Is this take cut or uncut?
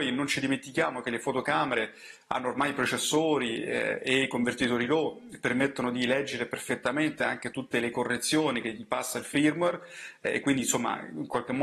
uncut